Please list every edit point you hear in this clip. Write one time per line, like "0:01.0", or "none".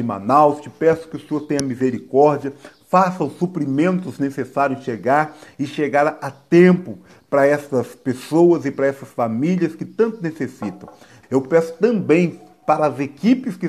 0:11.2